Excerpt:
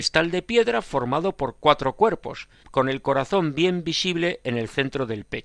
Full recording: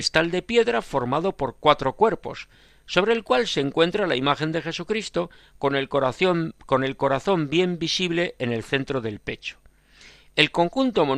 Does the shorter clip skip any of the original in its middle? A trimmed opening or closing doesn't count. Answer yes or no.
yes